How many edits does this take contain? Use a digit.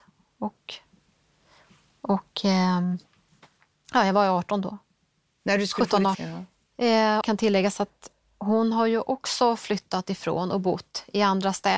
2